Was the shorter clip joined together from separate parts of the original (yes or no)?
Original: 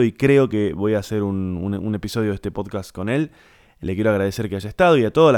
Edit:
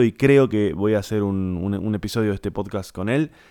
no